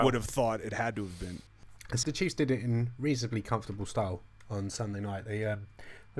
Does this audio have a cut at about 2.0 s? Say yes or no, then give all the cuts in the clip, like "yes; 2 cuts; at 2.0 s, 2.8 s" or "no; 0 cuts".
yes; 1 cut; at 2.0 s